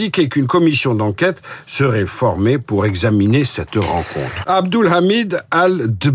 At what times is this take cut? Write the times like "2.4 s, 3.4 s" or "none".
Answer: 4.4 s

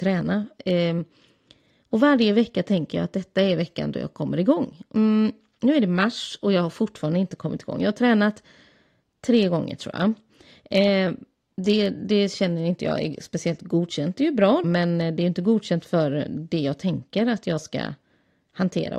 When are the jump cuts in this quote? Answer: 14.6 s

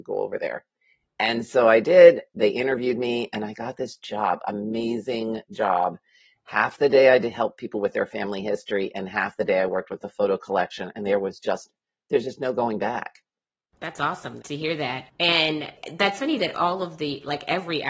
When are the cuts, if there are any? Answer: 14.4 s

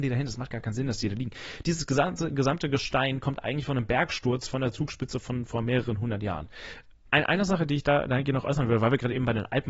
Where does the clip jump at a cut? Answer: 1.6 s, 7.1 s

